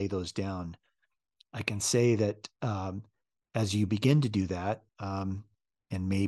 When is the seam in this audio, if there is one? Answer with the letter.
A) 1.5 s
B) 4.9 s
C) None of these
B